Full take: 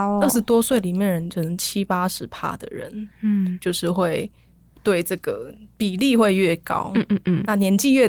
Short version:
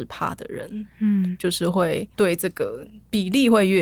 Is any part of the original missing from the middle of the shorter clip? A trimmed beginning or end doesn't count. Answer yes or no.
yes